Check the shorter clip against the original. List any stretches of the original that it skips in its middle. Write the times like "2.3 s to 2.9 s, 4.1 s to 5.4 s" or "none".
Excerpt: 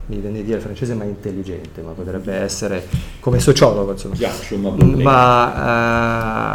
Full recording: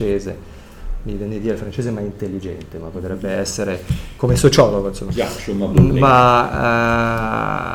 none